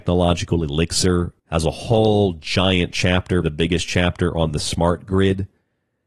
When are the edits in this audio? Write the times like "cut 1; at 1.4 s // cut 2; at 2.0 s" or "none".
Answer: cut 1; at 1.4 s // cut 2; at 3.4 s